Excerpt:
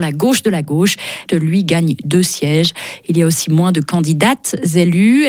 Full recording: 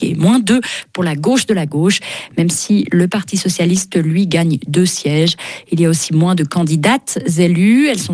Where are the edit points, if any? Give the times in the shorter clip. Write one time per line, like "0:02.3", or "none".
0:01.3